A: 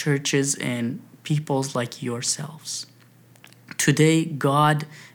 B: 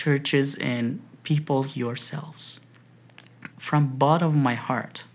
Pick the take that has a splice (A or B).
B